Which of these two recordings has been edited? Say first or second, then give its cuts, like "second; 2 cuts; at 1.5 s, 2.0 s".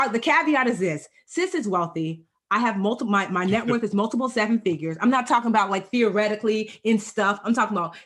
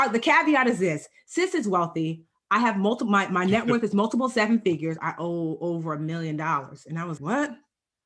second; 2 cuts; at 5.0 s, 7.2 s